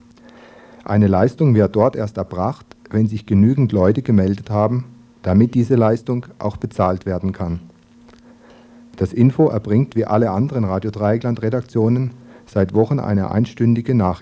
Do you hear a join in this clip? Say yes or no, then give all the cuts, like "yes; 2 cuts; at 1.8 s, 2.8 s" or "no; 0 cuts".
no; 0 cuts